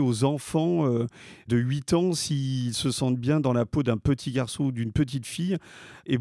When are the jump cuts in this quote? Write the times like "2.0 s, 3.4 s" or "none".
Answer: none